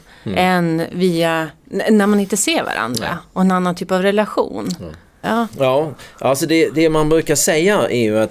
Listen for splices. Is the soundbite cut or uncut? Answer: cut